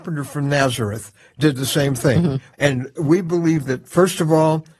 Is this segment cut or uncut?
cut